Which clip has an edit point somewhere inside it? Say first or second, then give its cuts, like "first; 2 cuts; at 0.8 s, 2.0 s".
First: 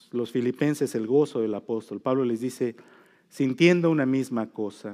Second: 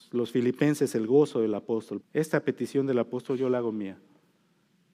second; 1 cut; at 2.0 s